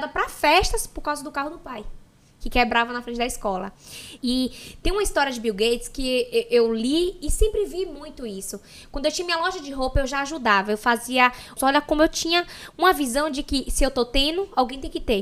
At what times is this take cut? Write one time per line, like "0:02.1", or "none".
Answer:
0:04.2
0:11.6